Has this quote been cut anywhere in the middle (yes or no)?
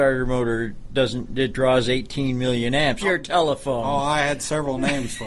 yes